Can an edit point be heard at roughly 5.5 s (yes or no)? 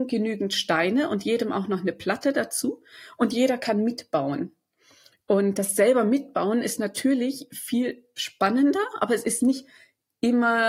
yes